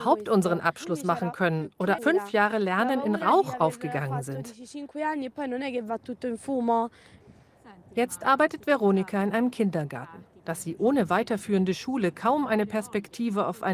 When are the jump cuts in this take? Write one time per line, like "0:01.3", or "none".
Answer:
0:02.0